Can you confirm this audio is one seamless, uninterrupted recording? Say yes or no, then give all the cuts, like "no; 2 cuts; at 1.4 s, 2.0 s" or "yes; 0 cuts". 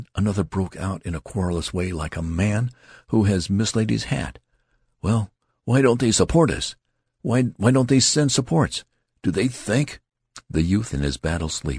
yes; 0 cuts